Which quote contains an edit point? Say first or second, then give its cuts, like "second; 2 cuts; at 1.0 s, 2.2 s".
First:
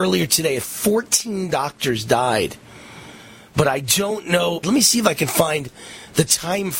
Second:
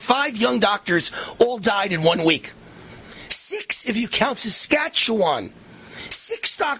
first; 1 cut; at 4.6 s